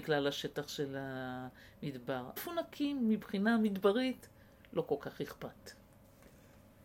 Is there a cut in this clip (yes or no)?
yes